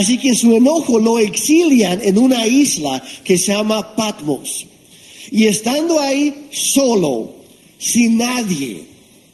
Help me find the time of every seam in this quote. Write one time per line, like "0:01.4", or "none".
none